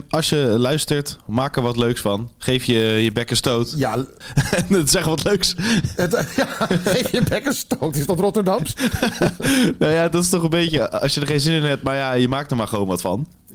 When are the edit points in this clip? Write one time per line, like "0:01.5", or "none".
none